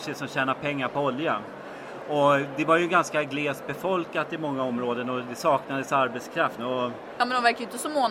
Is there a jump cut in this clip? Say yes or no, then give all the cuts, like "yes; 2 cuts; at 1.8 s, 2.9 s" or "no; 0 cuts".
yes; 1 cut; at 6.6 s